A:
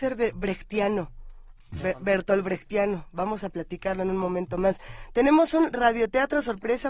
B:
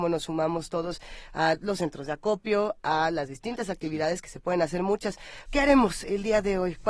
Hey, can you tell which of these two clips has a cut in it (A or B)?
B